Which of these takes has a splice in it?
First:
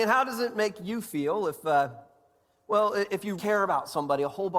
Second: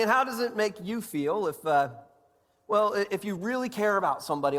first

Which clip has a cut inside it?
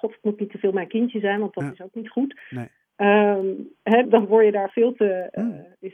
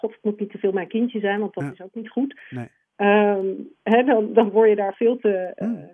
first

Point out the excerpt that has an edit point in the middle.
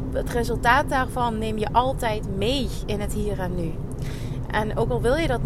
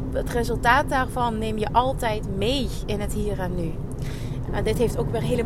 second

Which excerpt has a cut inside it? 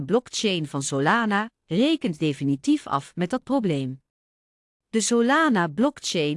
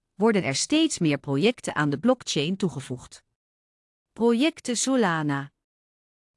first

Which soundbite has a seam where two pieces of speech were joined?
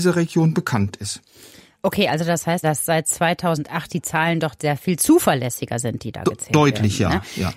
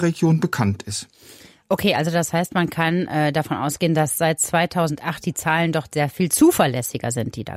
first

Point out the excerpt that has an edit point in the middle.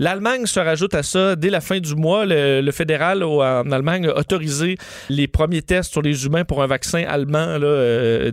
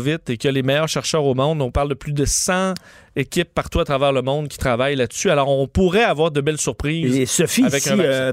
first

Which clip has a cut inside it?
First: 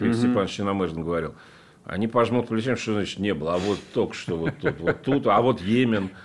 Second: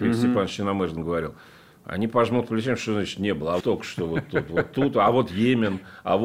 second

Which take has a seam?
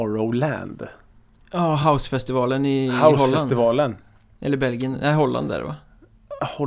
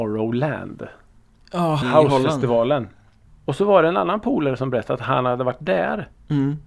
second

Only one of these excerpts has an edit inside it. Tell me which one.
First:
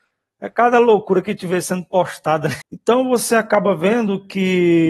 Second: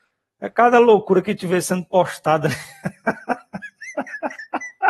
first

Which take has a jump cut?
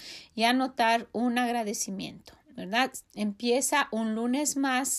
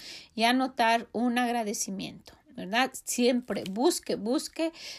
first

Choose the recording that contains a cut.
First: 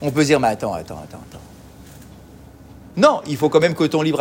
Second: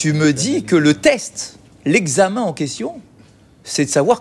first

